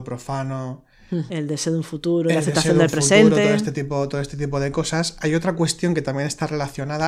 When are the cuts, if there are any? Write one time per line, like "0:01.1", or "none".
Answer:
0:01.3